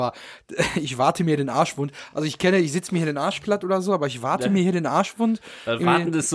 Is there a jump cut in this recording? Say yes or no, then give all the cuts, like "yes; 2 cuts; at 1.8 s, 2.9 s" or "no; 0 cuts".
no; 0 cuts